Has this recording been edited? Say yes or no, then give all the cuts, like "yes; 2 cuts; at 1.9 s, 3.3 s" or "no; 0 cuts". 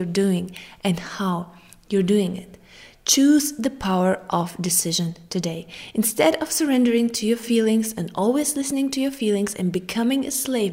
no; 0 cuts